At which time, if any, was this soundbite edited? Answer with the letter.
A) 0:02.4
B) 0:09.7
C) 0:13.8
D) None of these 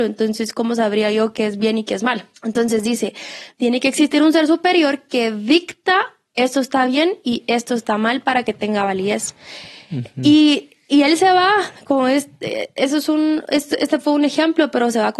A